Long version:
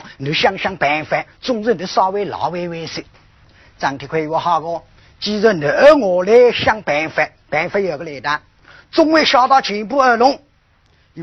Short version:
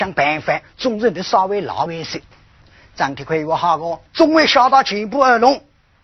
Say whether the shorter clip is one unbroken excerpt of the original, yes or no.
no